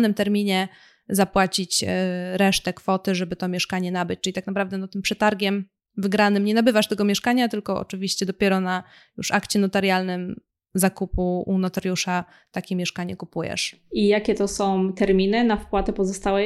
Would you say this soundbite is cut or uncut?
uncut